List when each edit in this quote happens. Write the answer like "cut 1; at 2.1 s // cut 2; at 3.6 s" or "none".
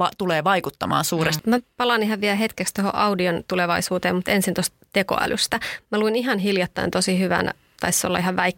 cut 1; at 1.4 s